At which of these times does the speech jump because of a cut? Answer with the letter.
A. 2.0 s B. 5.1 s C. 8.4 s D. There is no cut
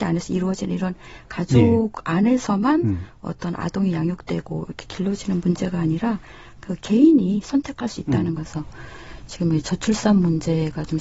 C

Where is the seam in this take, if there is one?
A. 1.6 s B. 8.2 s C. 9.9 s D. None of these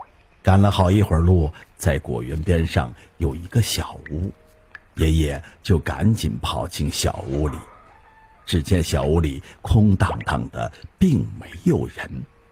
A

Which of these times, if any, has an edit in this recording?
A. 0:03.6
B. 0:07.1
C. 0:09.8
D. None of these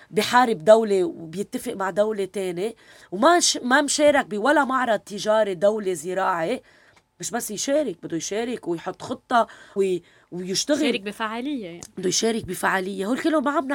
C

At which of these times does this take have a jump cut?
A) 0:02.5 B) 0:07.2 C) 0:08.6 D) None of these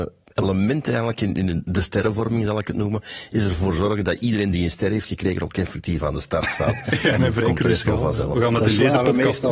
B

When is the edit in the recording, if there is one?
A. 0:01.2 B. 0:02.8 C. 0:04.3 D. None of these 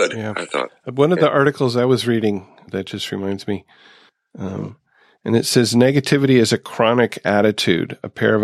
C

